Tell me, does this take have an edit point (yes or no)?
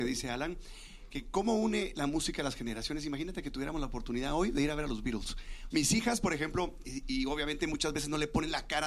yes